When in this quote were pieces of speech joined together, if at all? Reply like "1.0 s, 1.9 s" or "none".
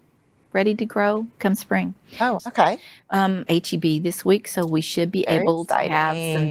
2.4 s, 3.5 s